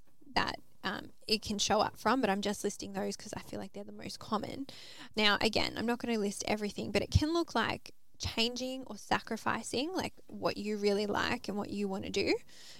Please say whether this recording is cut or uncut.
cut